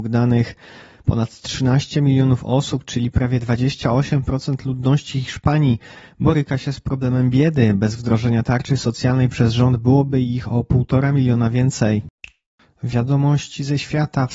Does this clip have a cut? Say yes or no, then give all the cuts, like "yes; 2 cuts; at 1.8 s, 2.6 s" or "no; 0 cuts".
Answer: no; 0 cuts